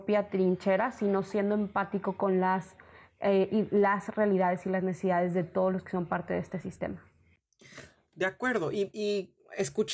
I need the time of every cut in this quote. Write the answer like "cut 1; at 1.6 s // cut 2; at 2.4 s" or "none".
none